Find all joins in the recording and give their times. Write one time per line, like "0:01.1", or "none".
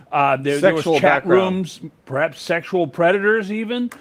none